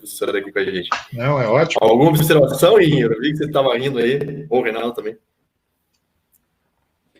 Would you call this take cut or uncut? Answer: uncut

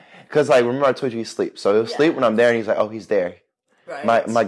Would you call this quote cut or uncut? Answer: uncut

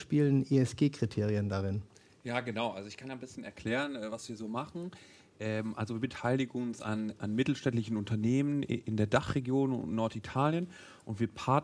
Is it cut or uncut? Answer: uncut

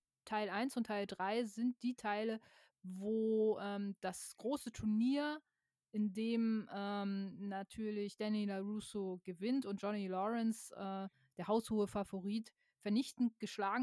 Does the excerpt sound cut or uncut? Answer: uncut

